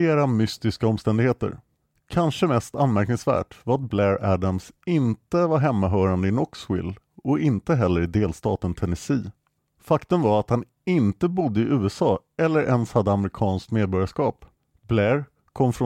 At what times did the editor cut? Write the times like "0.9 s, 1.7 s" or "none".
none